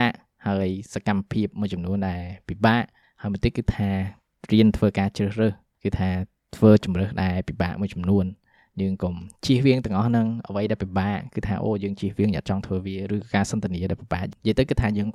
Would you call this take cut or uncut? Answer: uncut